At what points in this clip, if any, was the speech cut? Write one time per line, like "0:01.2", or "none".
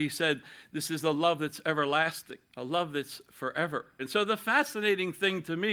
0:02.5
0:04.0